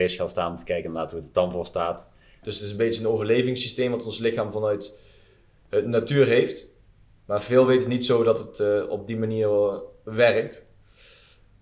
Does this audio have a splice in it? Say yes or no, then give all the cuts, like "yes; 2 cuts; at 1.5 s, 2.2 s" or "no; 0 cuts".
yes; 1 cut; at 2.4 s